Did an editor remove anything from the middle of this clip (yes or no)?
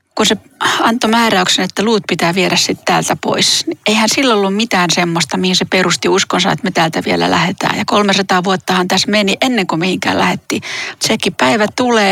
yes